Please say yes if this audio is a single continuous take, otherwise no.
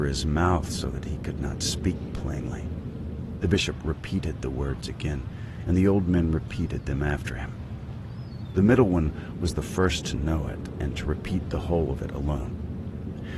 no